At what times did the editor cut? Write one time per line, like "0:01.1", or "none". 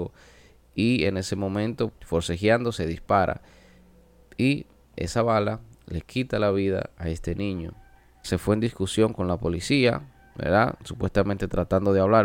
0:01.9
0:08.2